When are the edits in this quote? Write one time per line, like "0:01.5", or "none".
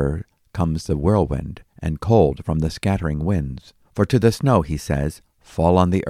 0:03.8